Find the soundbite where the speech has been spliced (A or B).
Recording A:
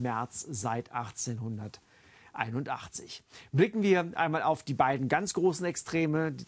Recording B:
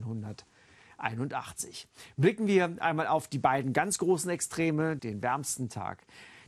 B